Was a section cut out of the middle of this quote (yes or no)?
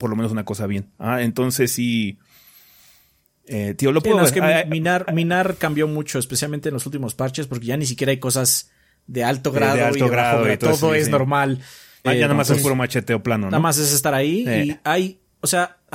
yes